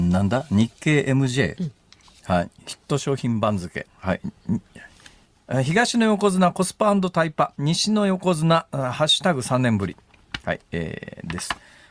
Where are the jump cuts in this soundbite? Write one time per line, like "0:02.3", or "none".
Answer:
0:03.9